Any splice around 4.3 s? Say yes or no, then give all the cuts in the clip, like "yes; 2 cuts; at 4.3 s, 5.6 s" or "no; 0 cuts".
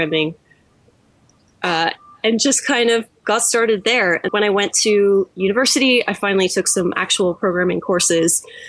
yes; 1 cut; at 4.3 s